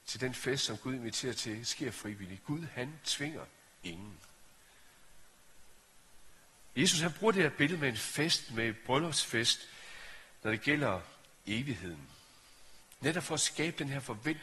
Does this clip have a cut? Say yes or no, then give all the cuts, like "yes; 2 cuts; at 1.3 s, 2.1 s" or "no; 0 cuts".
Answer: no; 0 cuts